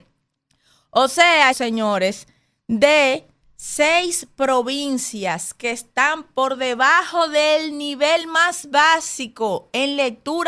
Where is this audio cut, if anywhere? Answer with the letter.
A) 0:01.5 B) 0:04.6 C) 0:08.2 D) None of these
A